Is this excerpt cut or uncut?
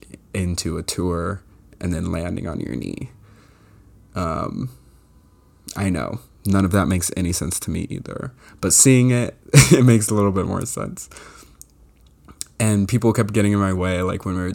uncut